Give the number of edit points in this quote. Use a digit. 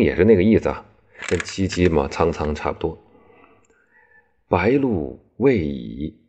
0